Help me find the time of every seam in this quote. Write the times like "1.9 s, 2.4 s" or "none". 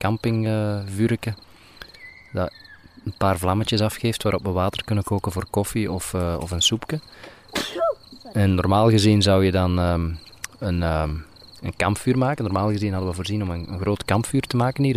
none